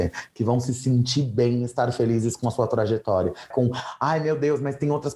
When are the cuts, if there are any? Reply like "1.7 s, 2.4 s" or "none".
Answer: 3.5 s